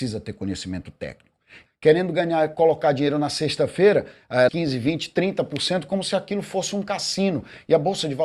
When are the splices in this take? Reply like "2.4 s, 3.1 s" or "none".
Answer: 1.7 s, 4.5 s